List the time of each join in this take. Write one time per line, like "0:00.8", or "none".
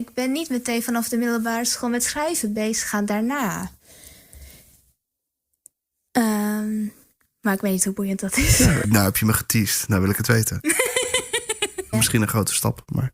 0:08.8
0:11.9